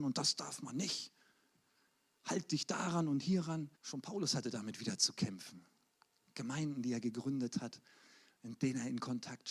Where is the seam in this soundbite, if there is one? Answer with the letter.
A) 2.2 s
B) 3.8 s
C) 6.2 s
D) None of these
B